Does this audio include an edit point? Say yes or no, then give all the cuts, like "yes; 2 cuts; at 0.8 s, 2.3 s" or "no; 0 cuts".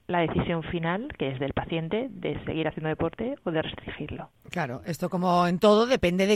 no; 0 cuts